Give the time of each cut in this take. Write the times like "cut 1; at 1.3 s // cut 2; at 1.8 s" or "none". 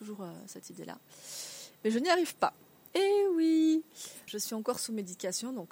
cut 1; at 2.9 s // cut 2; at 4.3 s

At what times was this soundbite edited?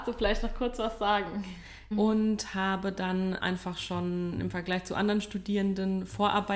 cut 1; at 1.9 s

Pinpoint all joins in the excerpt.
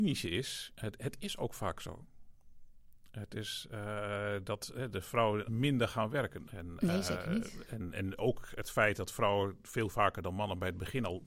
cut 1; at 5.4 s // cut 2; at 6.5 s

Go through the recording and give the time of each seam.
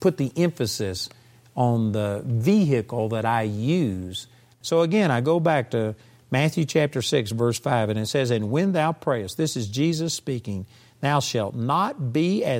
cut 1; at 4.5 s

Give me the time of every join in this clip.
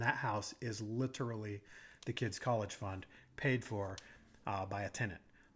none

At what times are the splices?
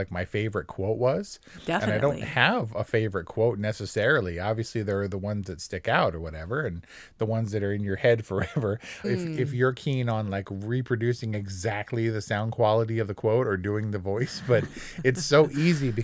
cut 1; at 9.0 s

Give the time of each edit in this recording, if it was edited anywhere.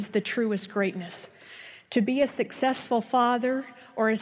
none

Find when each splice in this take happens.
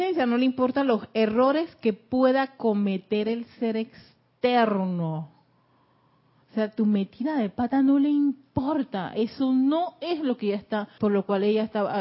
cut 1; at 11.0 s

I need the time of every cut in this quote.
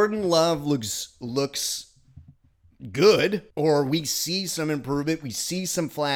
cut 1; at 3.5 s

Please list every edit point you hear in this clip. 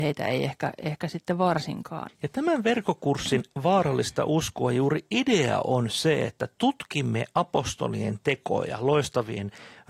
cut 1; at 2.1 s

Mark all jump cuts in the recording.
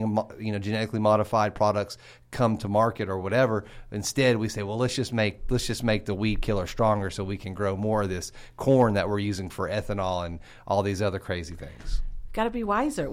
none

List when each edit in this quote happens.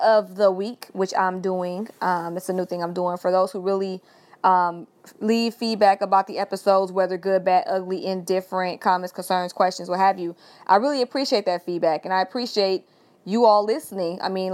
none

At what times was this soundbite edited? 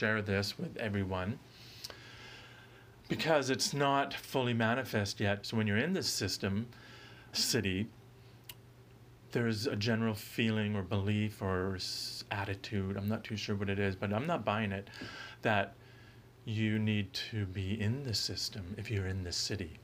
cut 1; at 3.0 s // cut 2; at 5.4 s // cut 3; at 7.3 s

